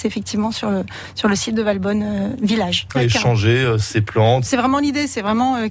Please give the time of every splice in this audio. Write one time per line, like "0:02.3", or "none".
0:02.9
0:04.5